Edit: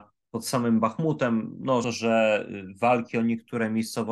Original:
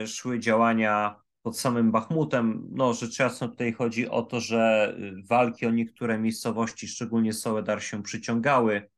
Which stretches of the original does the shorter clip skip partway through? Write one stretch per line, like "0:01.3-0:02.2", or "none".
0:03.0-0:04.3